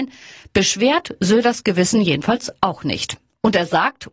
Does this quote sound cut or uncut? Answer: uncut